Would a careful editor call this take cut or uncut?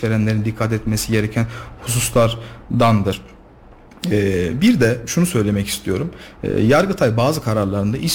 uncut